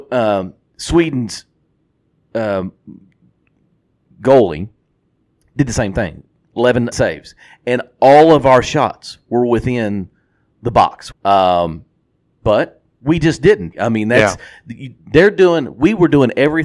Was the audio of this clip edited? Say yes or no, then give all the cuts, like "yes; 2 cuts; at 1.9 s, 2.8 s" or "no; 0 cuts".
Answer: yes; 3 cuts; at 6.9 s, 11.1 s, 13.7 s